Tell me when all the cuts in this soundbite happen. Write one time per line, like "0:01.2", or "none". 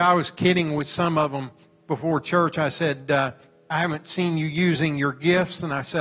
none